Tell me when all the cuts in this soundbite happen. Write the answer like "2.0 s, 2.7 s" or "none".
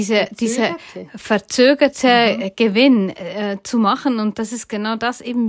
none